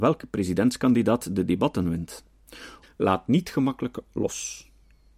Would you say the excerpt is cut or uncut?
cut